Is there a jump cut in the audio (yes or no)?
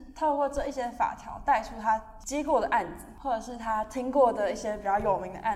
no